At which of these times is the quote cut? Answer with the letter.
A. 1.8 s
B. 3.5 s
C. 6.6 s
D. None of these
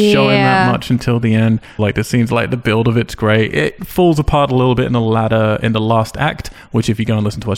A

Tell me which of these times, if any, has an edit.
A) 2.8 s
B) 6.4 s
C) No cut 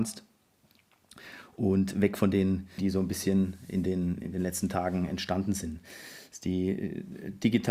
A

